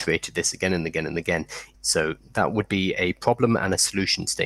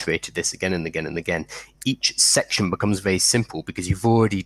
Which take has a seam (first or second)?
first